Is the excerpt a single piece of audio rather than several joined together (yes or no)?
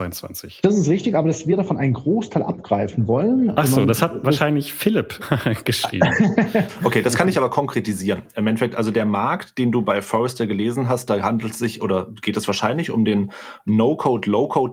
yes